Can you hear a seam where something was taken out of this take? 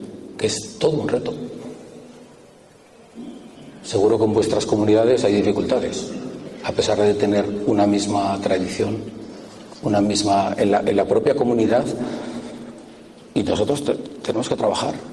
no; 0 cuts

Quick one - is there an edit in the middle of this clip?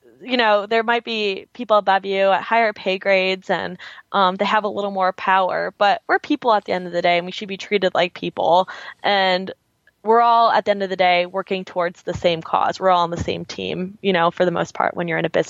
no; 0 cuts

